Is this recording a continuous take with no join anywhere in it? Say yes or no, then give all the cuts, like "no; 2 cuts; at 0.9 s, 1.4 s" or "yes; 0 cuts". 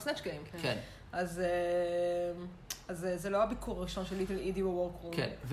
yes; 0 cuts